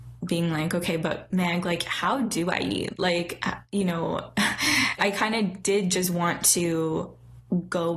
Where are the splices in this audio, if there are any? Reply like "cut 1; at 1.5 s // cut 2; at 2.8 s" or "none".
cut 1; at 5.0 s

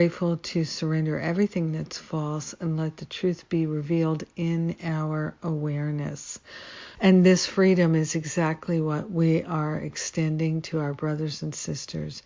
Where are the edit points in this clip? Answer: cut 1; at 6.9 s

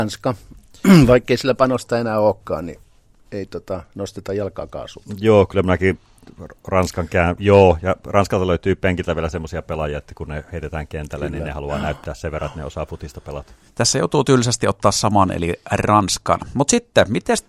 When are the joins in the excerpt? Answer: cut 1; at 7.4 s

